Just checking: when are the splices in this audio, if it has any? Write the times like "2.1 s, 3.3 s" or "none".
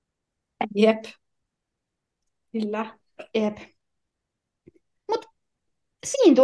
none